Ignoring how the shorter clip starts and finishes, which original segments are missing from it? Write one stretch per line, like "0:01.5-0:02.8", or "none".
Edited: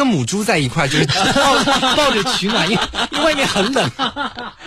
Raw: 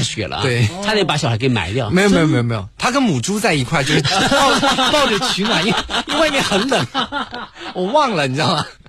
none